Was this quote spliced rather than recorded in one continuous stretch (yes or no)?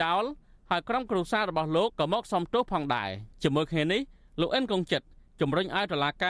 yes